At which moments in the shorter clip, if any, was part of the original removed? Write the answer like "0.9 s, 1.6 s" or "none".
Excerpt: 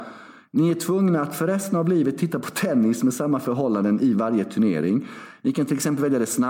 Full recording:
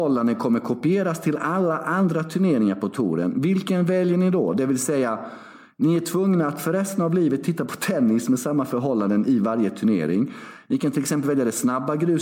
none